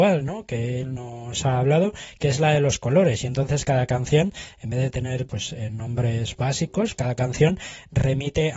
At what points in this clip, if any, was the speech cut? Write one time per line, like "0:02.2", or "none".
0:05.3
0:06.9